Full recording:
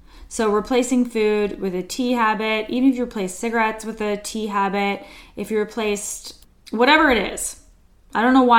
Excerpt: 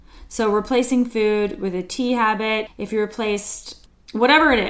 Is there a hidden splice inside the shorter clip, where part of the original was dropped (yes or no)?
yes